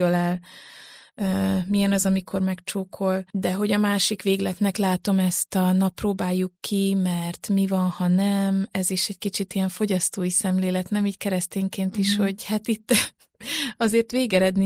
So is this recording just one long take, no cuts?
yes; 0 cuts

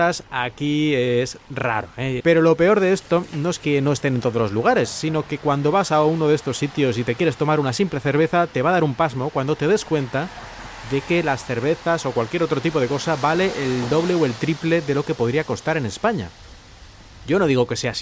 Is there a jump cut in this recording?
yes; 1 cut; at 2.2 s

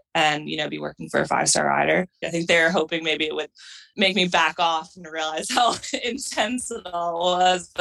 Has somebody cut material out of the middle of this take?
yes; 2 cuts; at 2.2 s, 3.9 s

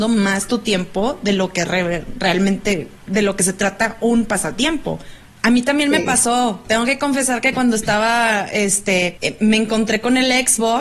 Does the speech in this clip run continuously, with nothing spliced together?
no; 2 cuts; at 5.3 s, 9.2 s

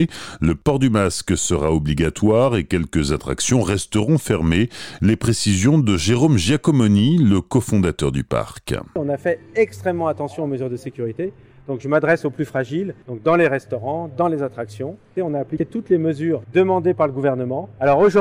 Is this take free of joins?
no; 2 cuts; at 13.0 s, 15.2 s

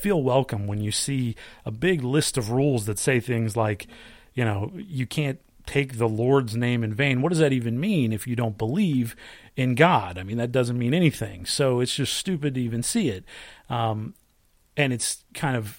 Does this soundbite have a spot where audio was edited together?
no; 0 cuts

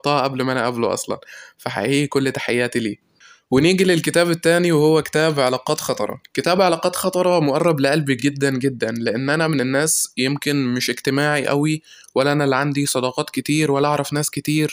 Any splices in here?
no; 0 cuts

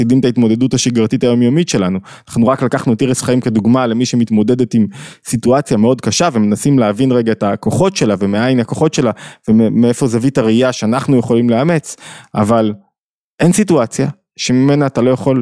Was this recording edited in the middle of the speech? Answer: no; 0 cuts

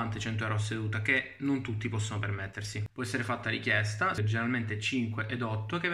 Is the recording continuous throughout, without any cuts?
no; 2 cuts; at 2.9 s, 4.2 s

